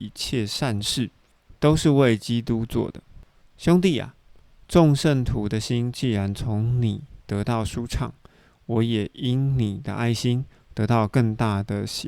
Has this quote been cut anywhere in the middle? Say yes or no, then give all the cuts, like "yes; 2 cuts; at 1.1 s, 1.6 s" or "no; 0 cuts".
yes; 1 cut; at 3.4 s